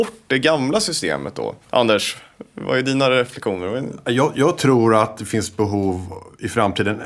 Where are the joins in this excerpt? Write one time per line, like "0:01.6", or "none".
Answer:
0:01.6